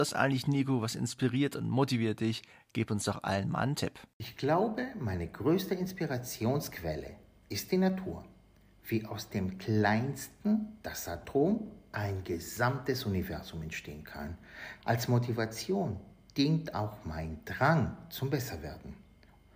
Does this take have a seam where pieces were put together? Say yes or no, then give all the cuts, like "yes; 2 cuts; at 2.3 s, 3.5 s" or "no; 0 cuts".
yes; 1 cut; at 14.8 s